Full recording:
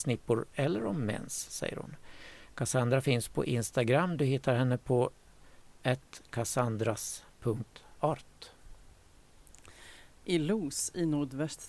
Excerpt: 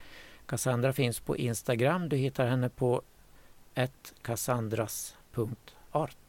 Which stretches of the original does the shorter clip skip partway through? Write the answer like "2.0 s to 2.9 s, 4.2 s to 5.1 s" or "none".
none